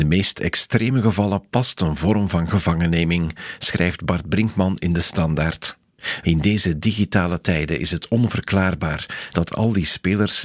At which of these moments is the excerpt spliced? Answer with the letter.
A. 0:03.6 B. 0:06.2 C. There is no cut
B